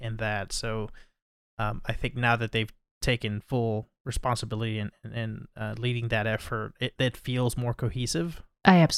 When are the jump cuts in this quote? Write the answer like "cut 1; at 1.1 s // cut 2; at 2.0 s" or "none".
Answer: none